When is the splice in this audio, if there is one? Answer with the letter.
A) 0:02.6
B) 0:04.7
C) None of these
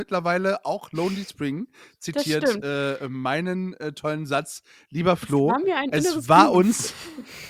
C